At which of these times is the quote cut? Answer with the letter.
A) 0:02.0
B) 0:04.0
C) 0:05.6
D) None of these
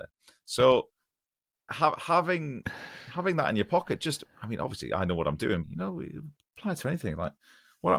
C